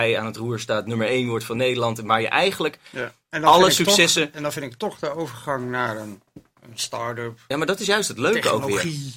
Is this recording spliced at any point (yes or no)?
no